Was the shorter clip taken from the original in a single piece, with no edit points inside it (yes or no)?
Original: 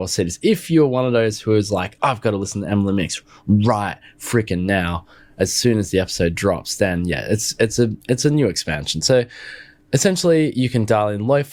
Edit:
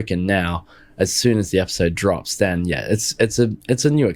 yes